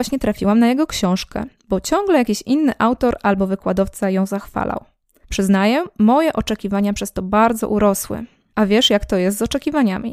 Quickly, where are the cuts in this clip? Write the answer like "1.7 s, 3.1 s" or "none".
5.2 s